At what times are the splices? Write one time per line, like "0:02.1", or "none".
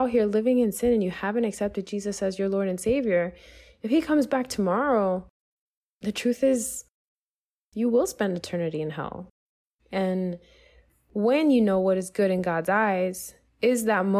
0:09.8